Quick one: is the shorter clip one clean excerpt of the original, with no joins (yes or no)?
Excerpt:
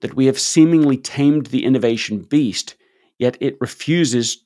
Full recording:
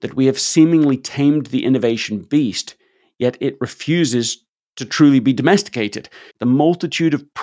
yes